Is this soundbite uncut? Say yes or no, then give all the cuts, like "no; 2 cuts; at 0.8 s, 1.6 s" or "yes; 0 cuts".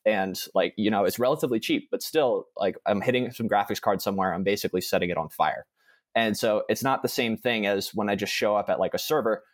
yes; 0 cuts